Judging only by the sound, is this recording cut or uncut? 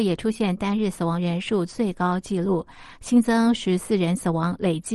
uncut